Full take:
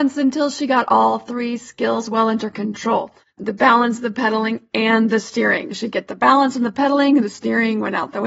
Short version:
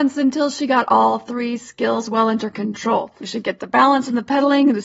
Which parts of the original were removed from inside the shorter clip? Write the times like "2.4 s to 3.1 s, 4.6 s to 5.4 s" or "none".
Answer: 3.2 s to 5.7 s